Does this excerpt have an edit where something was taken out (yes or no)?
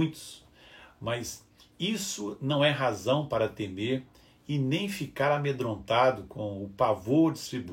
no